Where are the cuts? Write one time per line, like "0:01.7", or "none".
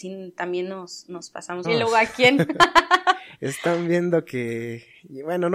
0:01.6